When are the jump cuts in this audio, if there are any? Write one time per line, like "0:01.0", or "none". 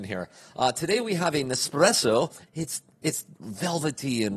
0:02.5